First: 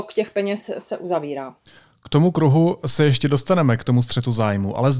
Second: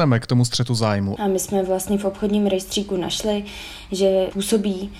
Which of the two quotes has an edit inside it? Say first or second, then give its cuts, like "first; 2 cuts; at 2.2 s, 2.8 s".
second; 1 cut; at 1.2 s